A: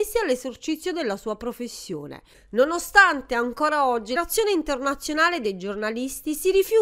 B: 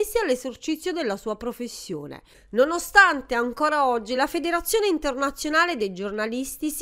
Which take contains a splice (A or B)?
A